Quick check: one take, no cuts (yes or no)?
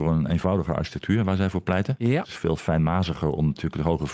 no